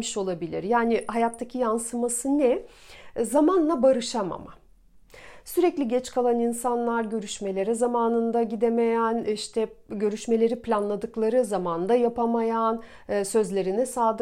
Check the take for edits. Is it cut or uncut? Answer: uncut